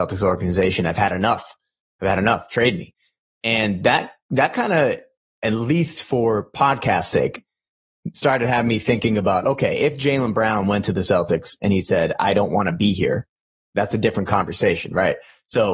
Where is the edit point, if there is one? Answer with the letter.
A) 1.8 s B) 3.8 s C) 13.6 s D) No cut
D